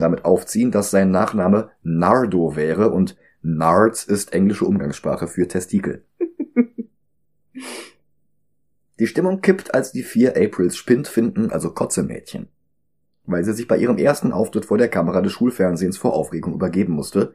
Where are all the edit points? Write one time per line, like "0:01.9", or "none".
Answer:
0:11.5